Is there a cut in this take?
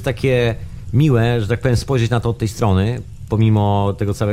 no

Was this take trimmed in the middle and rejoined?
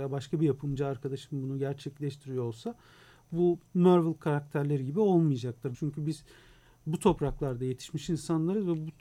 yes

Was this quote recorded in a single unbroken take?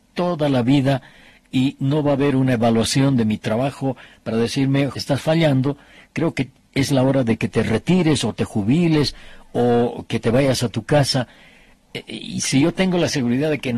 no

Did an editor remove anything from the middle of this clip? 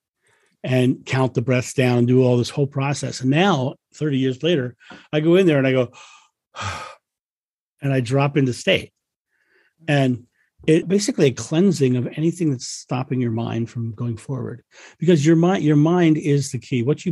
yes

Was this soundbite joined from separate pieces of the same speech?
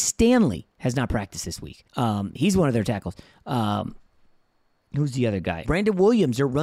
yes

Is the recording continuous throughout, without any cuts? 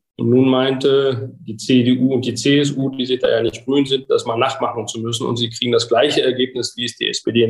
yes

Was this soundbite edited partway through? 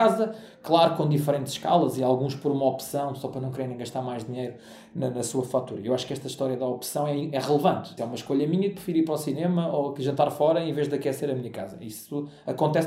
yes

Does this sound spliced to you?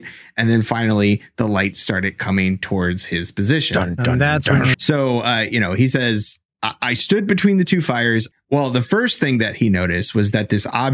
yes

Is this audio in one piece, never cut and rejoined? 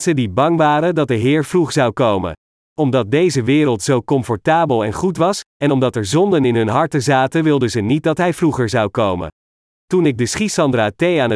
no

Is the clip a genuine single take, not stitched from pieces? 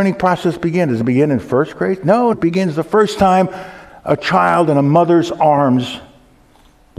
no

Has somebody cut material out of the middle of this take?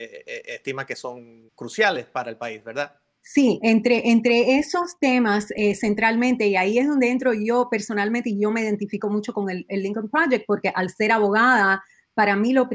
yes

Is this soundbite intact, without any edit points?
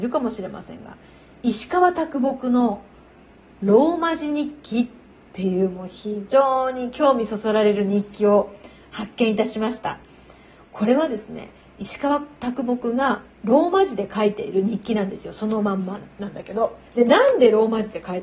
no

